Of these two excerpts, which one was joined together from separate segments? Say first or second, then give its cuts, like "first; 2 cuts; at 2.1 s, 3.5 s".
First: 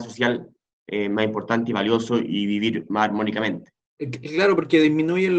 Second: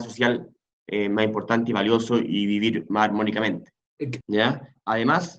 second; 1 cut; at 4.2 s